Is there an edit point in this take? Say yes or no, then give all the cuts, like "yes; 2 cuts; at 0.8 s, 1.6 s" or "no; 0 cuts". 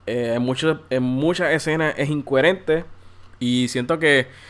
yes; 1 cut; at 3.4 s